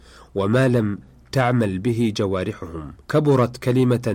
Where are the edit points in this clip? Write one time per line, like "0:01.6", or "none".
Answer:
0:03.0